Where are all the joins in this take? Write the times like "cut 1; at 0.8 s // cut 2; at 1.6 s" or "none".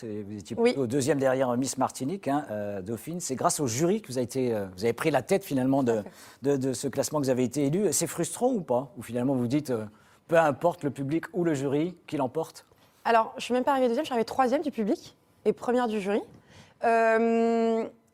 none

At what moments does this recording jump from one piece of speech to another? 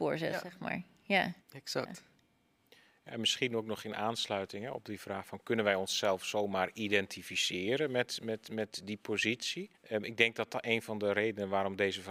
cut 1; at 1.4 s // cut 2; at 9.8 s

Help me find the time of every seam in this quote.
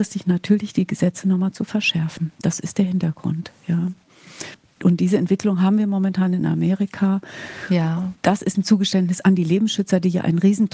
cut 1; at 8.1 s

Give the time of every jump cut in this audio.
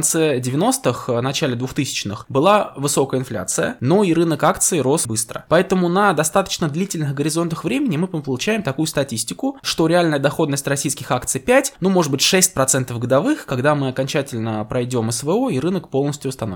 cut 1; at 5.0 s

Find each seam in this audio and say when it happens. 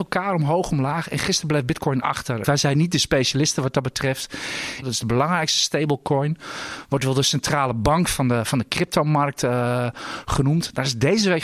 cut 1; at 2.4 s // cut 2; at 4.8 s

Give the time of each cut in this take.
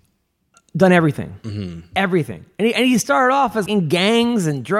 cut 1; at 3.7 s

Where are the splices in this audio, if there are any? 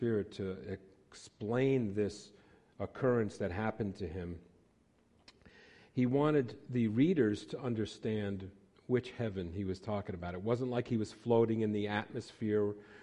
none

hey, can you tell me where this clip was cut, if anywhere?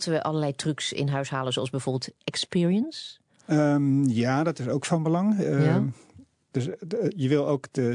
none

